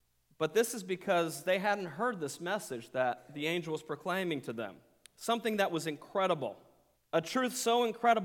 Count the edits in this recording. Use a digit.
1